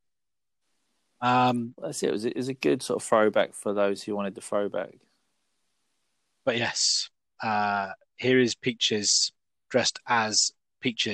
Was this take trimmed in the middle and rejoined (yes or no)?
no